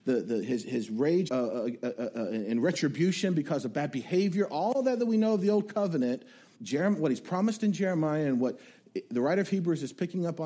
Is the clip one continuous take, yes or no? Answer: no